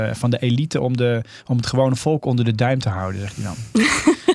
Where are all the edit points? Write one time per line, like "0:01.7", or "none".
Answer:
none